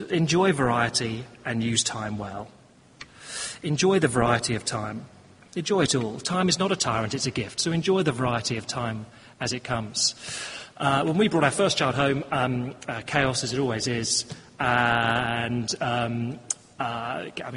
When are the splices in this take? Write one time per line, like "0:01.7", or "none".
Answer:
none